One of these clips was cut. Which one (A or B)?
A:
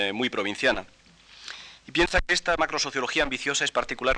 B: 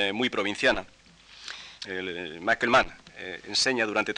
B